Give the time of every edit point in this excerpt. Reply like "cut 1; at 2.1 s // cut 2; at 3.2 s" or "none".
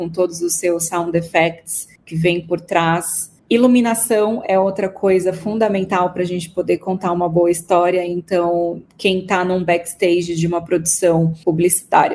none